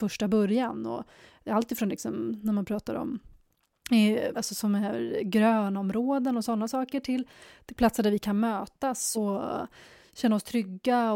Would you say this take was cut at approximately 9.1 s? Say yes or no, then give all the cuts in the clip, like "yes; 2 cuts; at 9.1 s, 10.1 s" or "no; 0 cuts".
yes; 2 cuts; at 4.3 s, 9.1 s